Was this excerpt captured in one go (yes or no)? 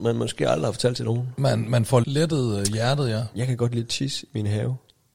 no